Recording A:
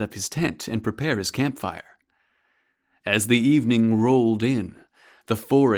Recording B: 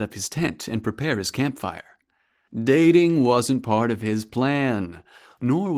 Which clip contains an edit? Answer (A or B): B